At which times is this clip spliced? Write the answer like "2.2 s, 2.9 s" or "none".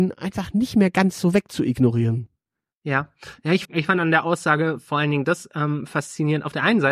3.6 s